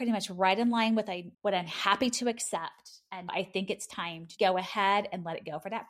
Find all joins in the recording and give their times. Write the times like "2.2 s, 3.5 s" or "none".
1.3 s, 3.3 s, 4.4 s